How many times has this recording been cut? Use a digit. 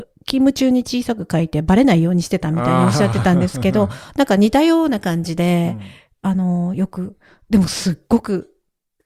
0